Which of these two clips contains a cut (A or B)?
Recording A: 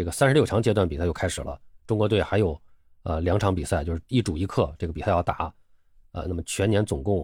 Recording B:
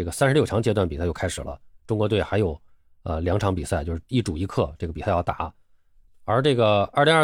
B